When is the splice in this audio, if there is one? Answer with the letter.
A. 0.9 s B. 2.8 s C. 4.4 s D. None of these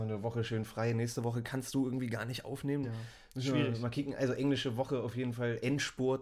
B